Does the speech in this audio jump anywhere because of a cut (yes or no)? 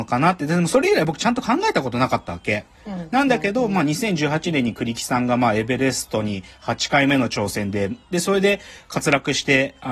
yes